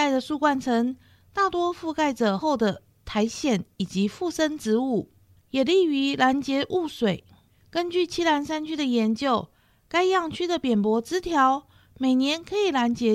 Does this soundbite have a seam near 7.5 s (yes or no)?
no